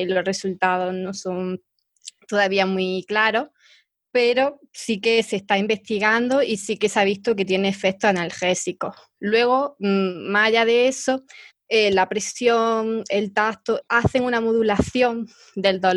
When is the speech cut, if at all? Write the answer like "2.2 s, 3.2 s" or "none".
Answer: 11.5 s, 13.8 s